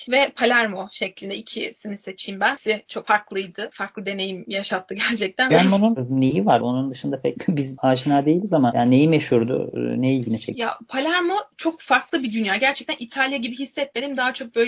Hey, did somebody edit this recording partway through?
yes; 2 cuts; at 5.5 s, 6.6 s

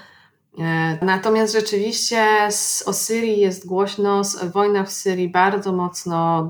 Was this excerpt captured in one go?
no; 1 cut; at 1.0 s

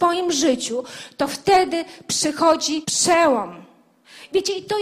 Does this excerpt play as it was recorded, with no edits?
no; 1 cut; at 2.8 s

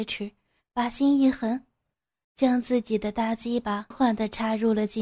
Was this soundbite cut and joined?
yes; 1 cut; at 3.9 s

